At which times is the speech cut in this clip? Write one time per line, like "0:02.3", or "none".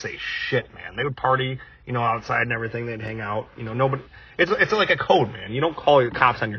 none